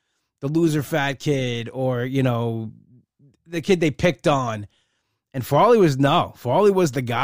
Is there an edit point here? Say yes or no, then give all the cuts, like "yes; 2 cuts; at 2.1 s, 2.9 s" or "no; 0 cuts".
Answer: no; 0 cuts